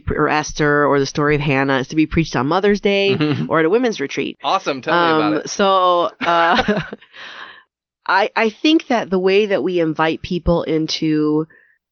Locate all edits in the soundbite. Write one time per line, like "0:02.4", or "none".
0:04.4